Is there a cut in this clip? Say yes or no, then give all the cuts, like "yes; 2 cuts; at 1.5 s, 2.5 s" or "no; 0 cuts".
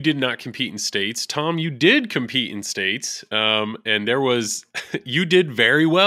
no; 0 cuts